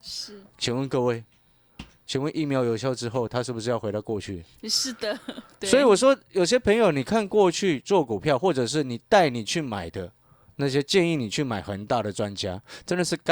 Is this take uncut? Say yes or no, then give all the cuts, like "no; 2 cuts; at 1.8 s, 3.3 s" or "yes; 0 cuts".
yes; 0 cuts